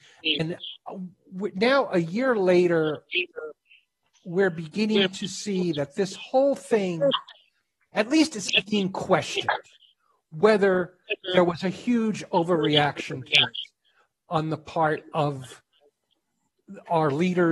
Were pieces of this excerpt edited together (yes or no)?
no